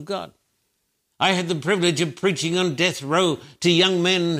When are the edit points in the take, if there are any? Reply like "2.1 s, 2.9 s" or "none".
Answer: 1.1 s